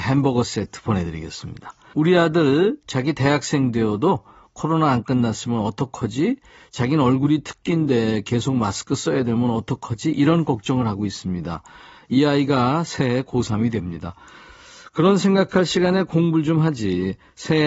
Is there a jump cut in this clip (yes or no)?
yes